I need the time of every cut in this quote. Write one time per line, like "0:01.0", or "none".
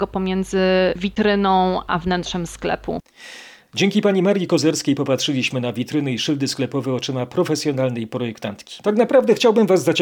0:08.8